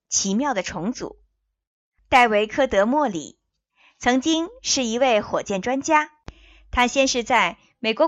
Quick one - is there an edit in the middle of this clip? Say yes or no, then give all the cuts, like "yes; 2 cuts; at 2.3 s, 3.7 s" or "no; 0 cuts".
yes; 1 cut; at 2.0 s